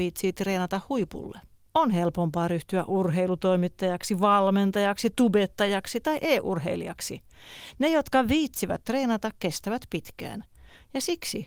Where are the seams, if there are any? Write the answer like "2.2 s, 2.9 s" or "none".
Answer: none